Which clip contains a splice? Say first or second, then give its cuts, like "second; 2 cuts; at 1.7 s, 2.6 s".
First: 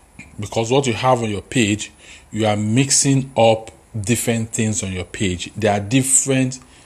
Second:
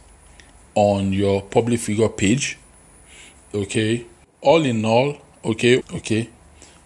second; 2 cuts; at 4.2 s, 5.8 s